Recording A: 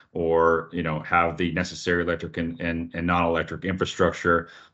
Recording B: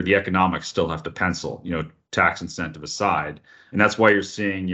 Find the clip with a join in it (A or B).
B